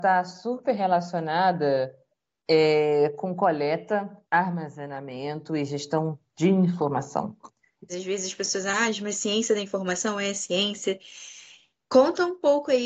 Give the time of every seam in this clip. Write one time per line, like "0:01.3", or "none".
0:07.9